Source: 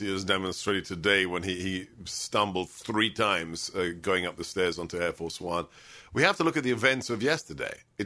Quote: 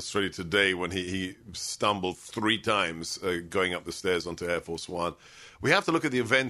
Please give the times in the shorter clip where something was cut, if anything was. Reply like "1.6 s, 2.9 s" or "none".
none